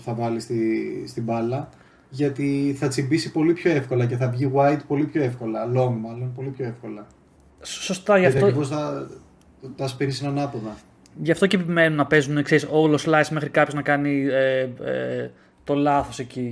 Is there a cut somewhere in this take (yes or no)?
no